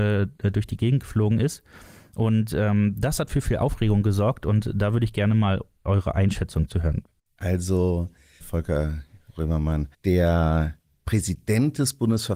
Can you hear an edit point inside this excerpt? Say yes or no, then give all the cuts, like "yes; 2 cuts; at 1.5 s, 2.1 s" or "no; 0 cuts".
yes; 2 cuts; at 8.4 s, 9.9 s